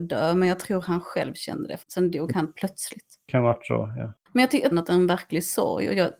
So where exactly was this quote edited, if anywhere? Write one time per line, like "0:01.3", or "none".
0:01.8
0:04.7